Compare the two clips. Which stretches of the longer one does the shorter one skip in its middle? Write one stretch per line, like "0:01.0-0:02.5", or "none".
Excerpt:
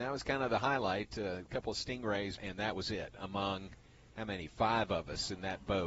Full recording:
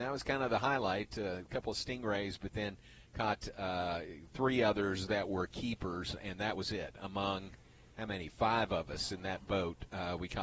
0:02.4-0:06.2